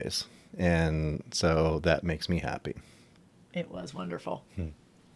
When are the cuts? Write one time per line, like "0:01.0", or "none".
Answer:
0:03.3